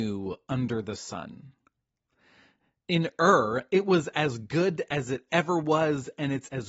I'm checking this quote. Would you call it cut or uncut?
uncut